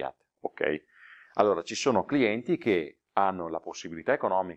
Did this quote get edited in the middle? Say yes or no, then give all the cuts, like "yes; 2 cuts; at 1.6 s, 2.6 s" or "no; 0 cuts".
no; 0 cuts